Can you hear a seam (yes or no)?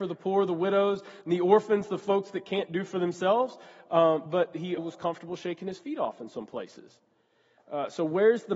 yes